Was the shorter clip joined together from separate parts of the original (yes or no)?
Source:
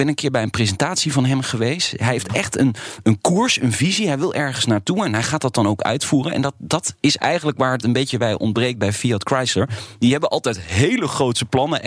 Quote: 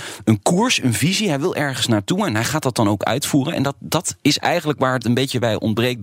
no